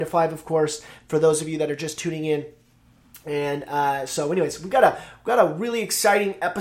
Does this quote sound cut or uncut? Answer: uncut